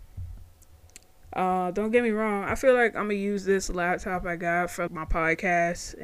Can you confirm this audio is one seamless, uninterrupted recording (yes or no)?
no